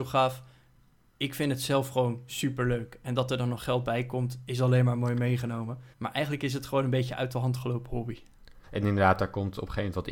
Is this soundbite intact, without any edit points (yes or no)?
no